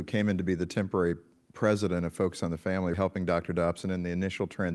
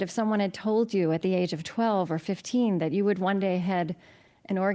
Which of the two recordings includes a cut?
first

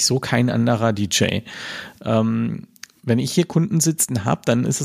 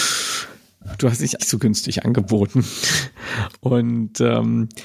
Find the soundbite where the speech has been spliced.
second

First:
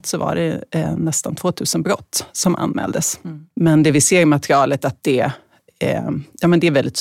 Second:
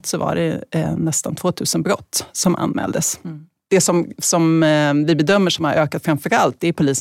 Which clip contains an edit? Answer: first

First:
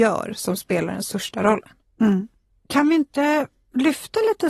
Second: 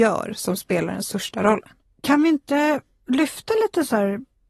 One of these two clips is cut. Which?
second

